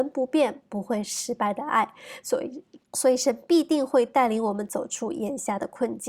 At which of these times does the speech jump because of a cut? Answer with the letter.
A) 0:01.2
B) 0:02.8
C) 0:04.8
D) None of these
B